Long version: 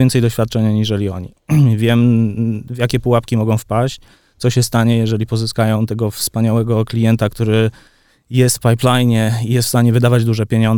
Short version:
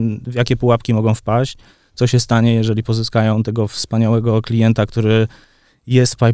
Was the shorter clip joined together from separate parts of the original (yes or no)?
no